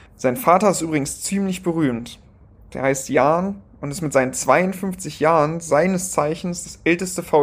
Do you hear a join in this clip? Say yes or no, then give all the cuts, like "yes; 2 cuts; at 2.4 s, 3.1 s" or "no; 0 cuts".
no; 0 cuts